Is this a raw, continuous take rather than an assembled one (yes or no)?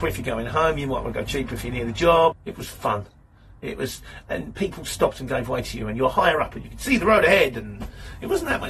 no